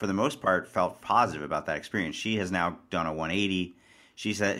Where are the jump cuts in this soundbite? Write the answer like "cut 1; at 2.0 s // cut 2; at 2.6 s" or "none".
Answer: cut 1; at 1.0 s